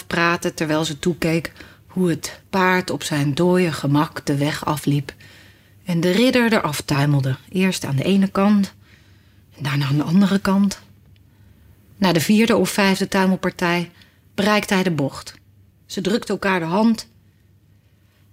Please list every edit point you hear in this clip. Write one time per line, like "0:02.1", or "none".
0:15.7